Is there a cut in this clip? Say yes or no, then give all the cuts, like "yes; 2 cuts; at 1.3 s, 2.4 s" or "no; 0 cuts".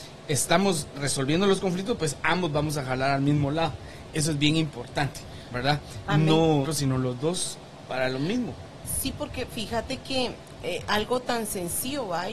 yes; 1 cut; at 6.7 s